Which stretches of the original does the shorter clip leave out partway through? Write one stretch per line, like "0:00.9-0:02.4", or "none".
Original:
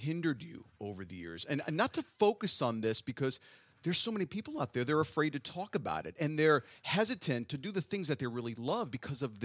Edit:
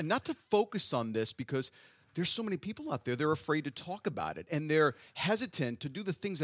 none

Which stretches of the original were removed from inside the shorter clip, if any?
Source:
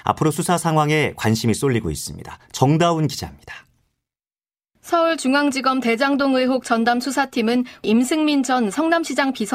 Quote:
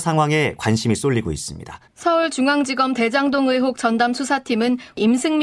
0:02.5-0:04.7

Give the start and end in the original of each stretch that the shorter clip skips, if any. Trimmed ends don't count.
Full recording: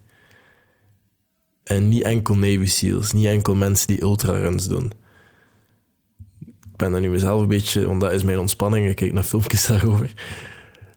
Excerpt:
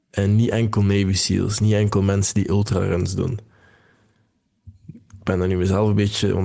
none

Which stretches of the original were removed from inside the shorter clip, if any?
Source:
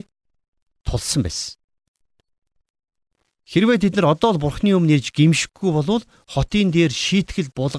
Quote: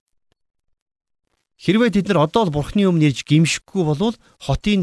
none

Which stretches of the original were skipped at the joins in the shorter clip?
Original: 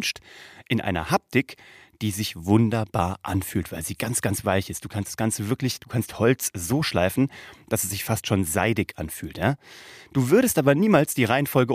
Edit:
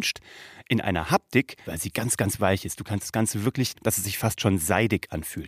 0:01.6-0:03.7
0:05.8-0:07.6

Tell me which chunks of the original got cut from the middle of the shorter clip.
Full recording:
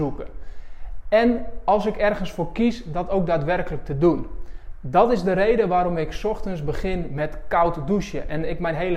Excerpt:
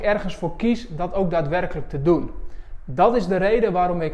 none

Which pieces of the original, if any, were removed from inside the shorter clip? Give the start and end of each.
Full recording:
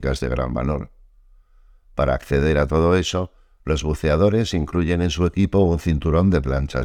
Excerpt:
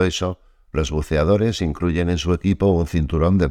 none

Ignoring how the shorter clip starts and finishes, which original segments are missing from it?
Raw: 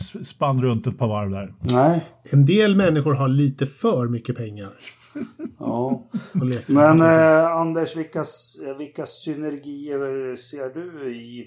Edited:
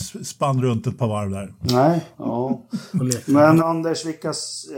0:02.1-0:05.5
0:07.0-0:07.5

